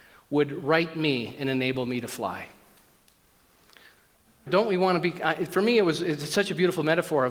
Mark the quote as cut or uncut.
cut